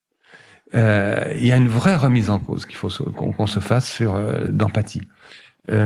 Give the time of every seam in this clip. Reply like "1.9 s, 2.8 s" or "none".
4.5 s